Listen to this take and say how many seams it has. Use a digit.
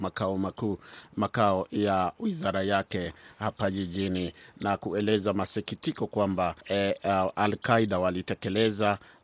1